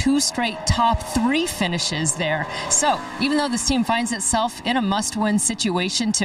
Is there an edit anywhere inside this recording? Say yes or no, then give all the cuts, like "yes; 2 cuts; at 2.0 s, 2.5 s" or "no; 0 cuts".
no; 0 cuts